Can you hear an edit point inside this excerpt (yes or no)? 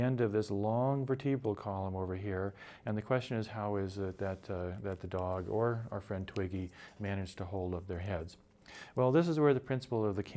no